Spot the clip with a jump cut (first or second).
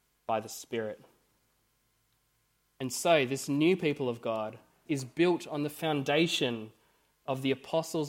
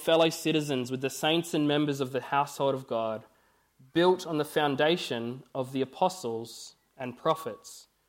first